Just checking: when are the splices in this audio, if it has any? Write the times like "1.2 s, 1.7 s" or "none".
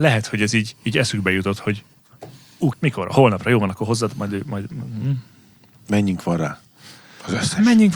2.7 s